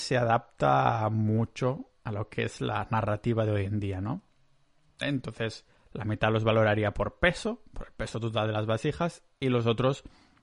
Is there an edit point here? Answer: yes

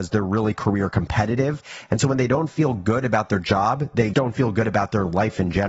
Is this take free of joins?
no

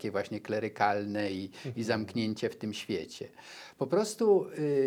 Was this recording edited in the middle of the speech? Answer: no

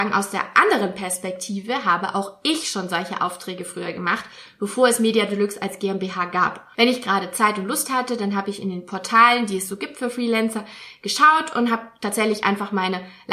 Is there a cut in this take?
yes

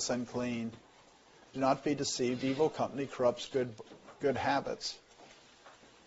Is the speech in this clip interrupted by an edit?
yes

